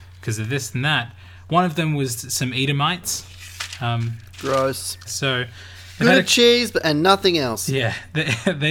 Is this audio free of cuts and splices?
no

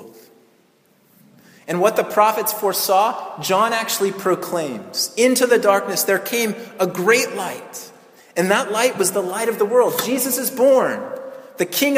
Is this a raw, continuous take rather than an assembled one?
yes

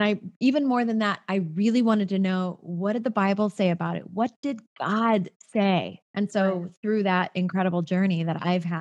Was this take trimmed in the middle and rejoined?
yes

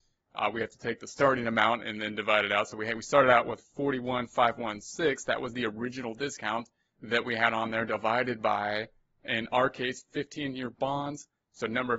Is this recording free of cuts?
yes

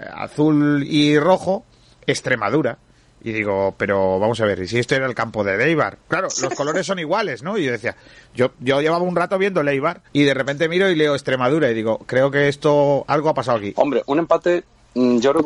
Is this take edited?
yes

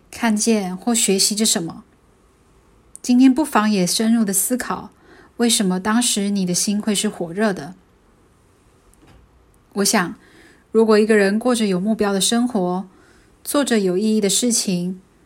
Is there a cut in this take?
no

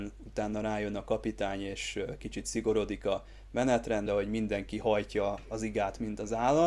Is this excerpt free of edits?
no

